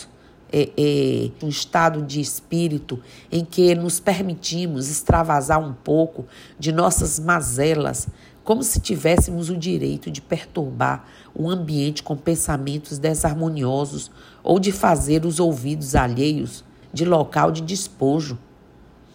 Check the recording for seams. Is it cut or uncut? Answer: cut